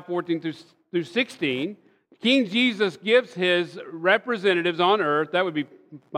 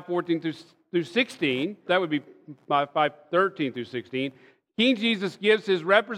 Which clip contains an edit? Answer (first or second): second